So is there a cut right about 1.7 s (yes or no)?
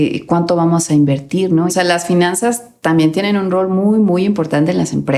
yes